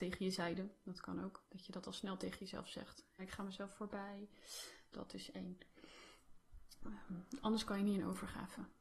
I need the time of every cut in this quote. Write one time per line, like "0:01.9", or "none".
0:03.2
0:04.9